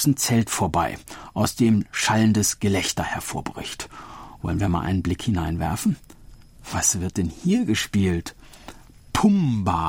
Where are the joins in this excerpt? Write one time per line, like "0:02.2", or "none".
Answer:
none

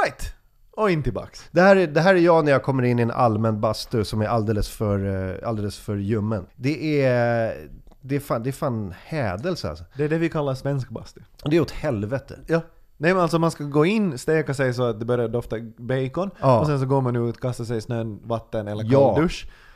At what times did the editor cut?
0:06.5

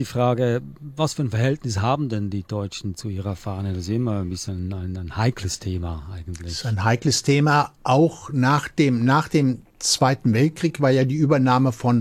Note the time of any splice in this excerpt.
none

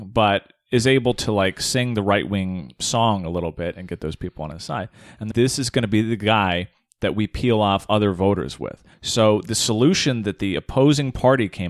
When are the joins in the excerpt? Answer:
0:05.3
0:08.9

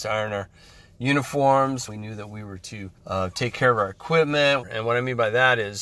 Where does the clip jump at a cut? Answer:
0:01.9
0:03.0
0:04.6

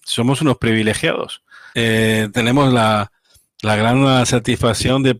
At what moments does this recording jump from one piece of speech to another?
0:01.7

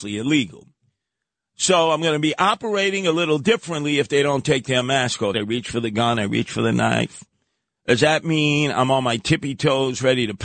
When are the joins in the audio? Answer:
0:05.3

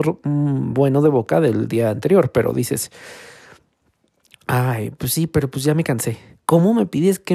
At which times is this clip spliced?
0:06.4

